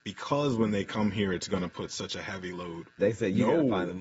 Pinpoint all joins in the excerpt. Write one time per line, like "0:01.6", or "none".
0:03.0